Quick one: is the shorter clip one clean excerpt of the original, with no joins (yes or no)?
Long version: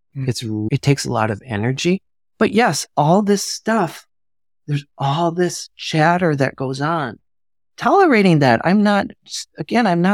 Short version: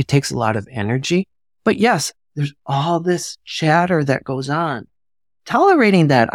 no